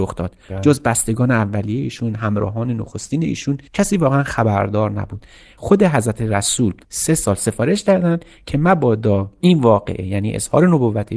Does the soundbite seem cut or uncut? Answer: cut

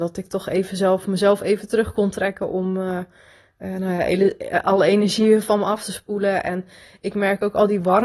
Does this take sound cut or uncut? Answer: uncut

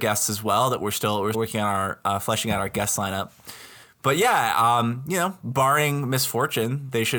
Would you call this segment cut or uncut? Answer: cut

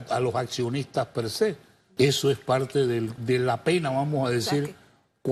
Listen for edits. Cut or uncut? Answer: cut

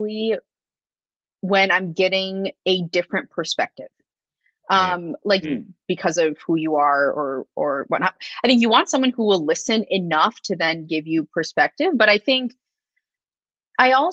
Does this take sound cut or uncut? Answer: cut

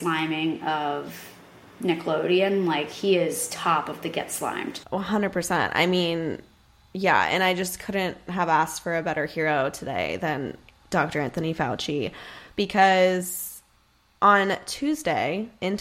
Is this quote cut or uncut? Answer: uncut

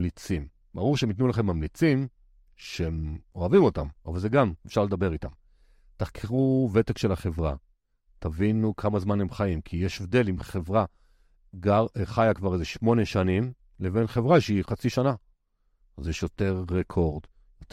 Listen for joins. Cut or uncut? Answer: uncut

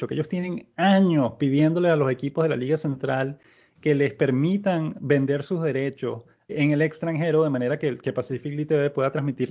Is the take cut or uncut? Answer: cut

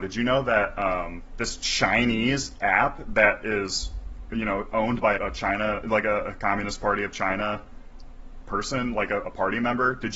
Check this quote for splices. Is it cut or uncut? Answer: cut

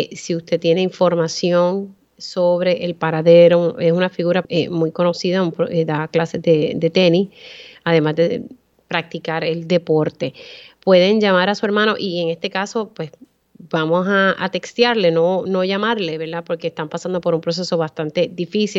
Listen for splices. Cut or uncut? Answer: cut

